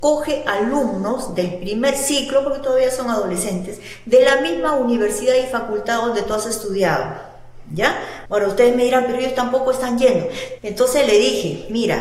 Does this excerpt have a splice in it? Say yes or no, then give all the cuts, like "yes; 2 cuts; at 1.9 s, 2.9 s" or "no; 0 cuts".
yes; 2 cuts; at 8.3 s, 10.6 s